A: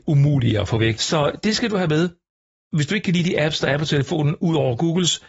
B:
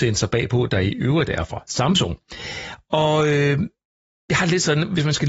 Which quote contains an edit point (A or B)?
A